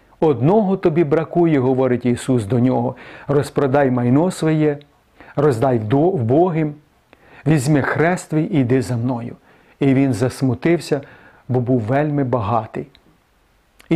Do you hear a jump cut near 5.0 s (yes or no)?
no